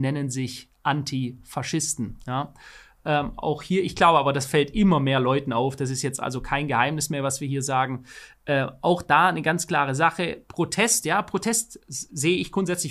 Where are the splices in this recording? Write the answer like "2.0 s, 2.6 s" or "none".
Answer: none